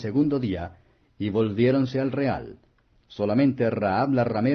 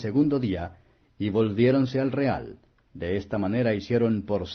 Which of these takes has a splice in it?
first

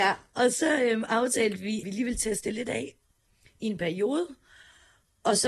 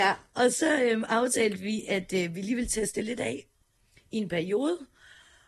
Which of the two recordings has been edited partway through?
first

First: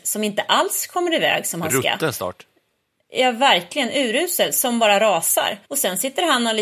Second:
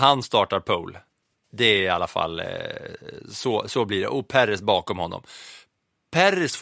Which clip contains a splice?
first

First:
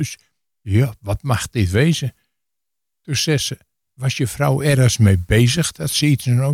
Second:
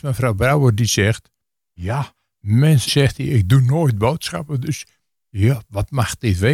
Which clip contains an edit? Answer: second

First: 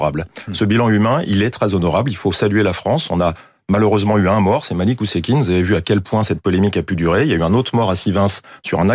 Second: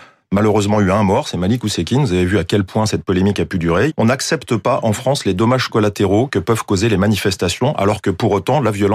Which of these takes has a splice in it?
second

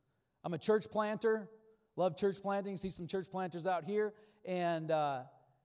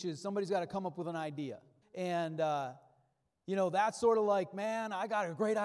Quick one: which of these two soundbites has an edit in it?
second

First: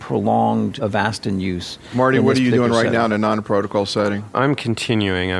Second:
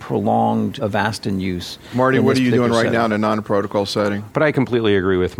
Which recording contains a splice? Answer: second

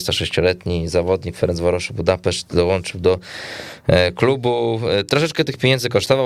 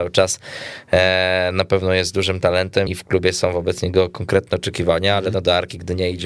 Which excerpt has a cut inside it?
second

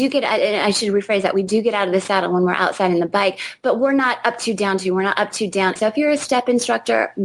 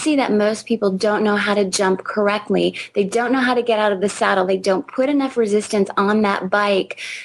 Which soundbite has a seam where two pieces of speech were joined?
first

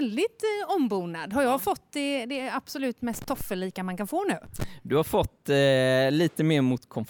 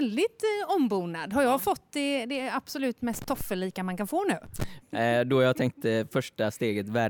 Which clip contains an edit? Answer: second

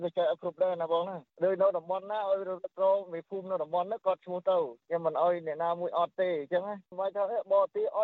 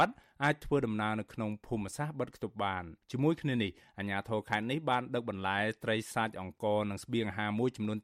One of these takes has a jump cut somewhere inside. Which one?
second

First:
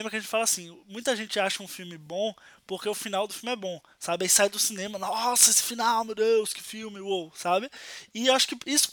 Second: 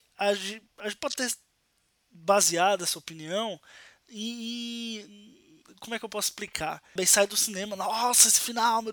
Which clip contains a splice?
second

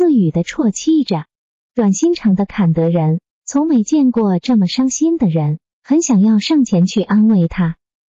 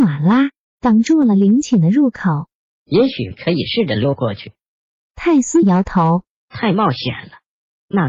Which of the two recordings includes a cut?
second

